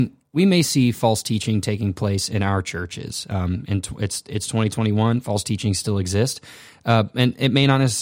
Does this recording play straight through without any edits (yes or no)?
yes